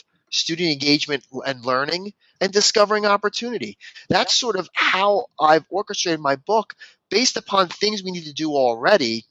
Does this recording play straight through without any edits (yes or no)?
no